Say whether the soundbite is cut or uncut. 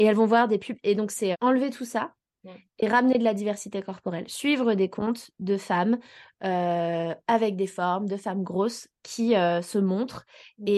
cut